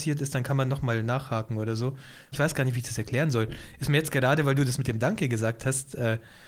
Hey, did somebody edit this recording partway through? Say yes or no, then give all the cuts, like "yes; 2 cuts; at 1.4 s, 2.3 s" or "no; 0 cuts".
yes; 1 cut; at 2.3 s